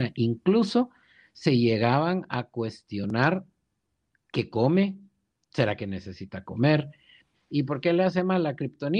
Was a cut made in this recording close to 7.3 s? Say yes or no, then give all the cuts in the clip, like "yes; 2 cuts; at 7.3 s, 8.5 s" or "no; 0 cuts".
yes; 1 cut; at 7.3 s